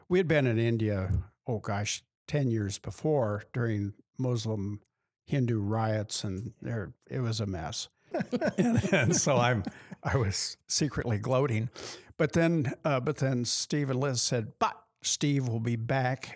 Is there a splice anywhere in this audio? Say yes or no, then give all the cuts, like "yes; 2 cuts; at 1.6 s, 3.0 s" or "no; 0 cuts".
yes; 1 cut; at 8.1 s